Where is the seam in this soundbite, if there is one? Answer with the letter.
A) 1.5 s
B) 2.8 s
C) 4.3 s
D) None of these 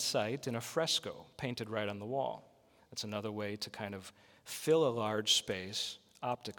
B